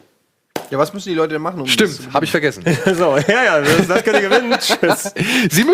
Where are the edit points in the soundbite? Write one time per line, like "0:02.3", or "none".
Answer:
none